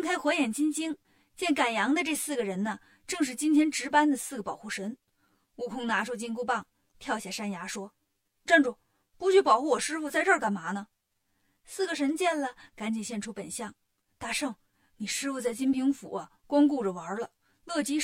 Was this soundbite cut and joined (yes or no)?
no